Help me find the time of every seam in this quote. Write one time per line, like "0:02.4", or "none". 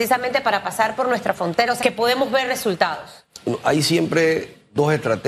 0:01.8

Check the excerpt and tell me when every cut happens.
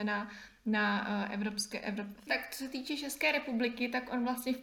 0:02.3

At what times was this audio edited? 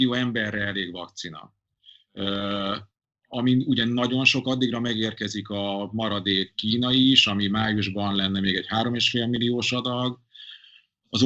none

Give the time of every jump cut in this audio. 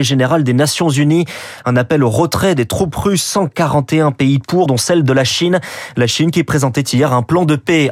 0:04.7

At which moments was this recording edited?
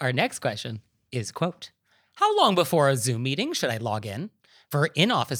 none

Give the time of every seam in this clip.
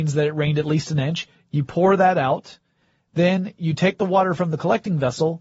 none

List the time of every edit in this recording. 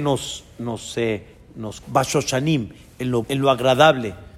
0:01.8
0:03.2

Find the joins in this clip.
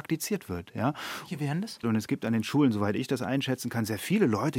0:01.8

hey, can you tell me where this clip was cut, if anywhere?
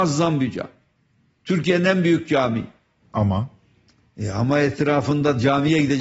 none

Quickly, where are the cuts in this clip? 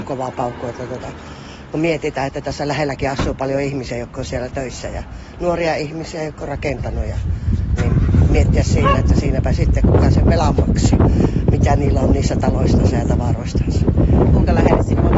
0:07.8

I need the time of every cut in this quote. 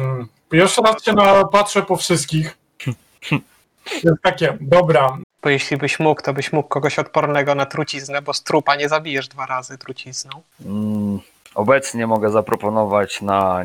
0:05.2
0:10.5

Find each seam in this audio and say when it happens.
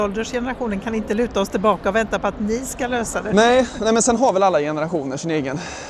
none

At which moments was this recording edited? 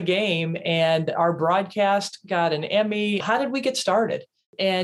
0:03.2

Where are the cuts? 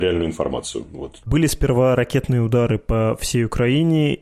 0:01.2

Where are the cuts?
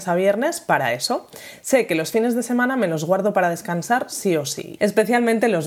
0:04.8

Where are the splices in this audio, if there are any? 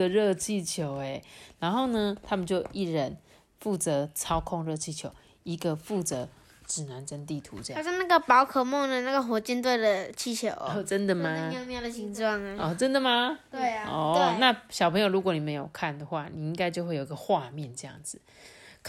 none

